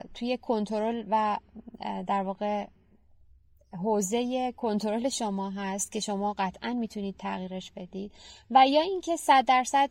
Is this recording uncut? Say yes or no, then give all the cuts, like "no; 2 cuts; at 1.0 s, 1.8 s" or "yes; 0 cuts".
yes; 0 cuts